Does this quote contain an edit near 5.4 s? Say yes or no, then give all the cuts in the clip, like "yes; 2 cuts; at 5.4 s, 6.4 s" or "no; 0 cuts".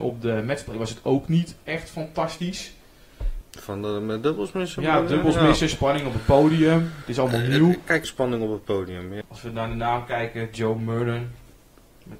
no; 3 cuts; at 3.4 s, 8.0 s, 9.2 s